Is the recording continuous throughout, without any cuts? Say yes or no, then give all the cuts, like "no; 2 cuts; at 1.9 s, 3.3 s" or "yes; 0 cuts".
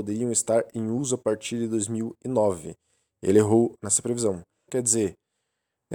no; 1 cut; at 4.7 s